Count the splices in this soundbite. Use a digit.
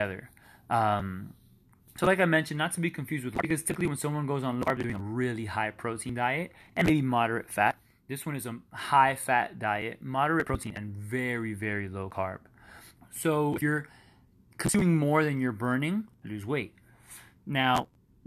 2